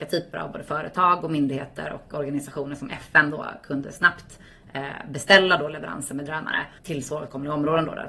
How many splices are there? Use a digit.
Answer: 1